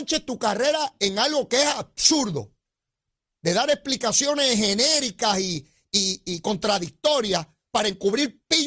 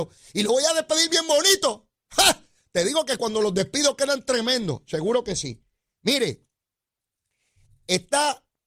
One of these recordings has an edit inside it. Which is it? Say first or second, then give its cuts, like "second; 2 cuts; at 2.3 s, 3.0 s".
second; 1 cut; at 2.0 s